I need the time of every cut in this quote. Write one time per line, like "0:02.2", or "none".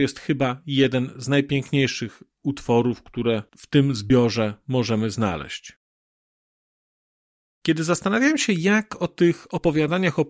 none

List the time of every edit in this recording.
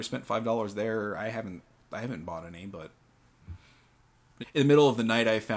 0:04.4

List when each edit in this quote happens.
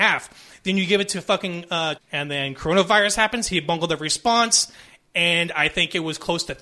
0:02.0

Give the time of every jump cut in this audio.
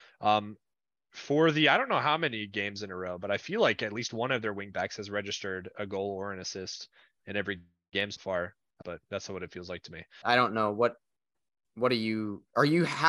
0:08.8
0:10.2

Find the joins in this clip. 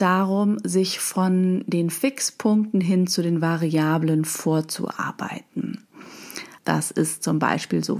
0:06.6

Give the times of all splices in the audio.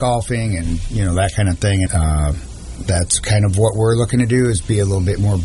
0:01.9

